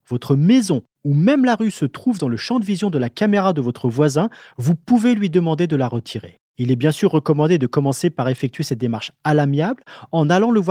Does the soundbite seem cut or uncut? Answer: cut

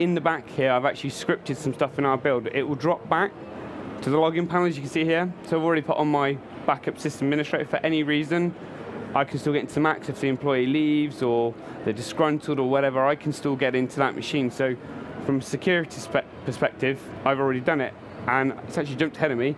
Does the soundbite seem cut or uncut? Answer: uncut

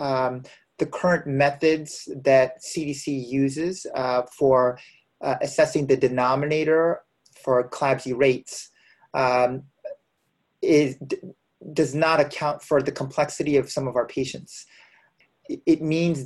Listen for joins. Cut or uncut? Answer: uncut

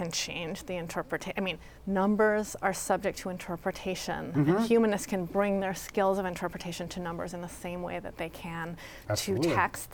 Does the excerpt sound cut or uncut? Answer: uncut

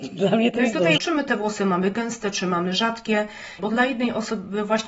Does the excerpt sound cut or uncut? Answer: cut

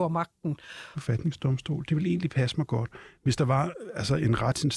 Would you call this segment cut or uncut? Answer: cut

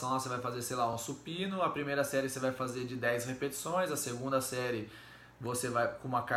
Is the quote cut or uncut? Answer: uncut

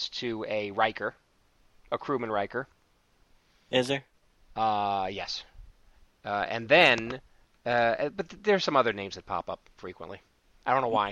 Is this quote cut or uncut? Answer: uncut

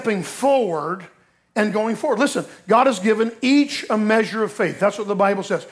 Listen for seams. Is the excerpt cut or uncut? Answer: uncut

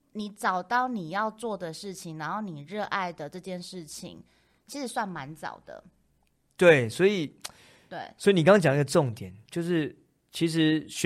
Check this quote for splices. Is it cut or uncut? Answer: uncut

